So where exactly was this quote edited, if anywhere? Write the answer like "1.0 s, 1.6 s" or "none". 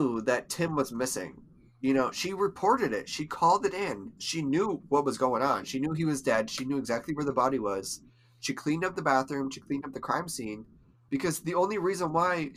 4.2 s, 11.1 s